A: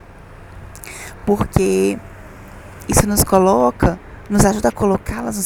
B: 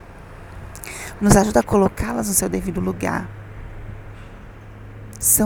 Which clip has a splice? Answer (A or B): B